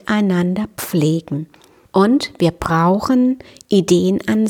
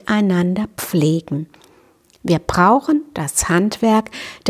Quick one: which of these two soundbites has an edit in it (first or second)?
first